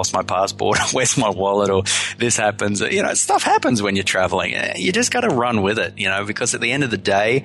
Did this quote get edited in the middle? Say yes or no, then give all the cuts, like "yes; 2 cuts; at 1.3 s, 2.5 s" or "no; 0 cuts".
no; 0 cuts